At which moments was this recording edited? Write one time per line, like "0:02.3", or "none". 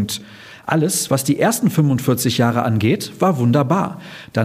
none